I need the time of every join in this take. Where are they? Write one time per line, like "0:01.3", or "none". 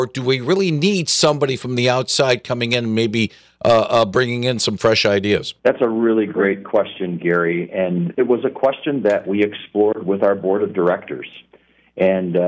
0:05.6